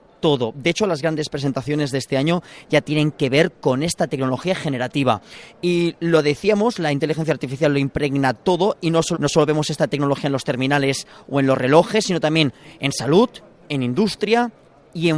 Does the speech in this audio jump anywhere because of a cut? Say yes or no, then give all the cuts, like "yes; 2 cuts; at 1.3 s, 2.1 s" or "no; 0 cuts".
yes; 1 cut; at 9.1 s